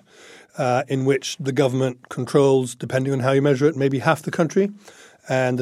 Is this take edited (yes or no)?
no